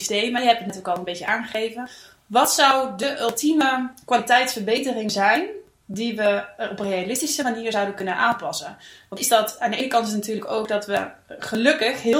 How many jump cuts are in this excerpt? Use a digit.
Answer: 0